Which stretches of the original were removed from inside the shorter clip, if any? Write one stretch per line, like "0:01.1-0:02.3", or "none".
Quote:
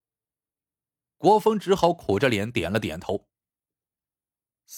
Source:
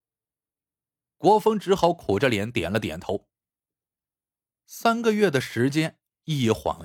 none